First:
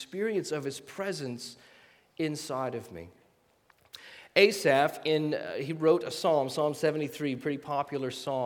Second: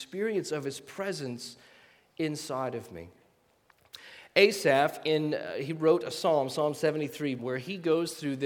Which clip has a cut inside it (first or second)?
second